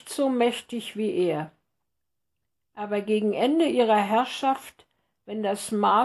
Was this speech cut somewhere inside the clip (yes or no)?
no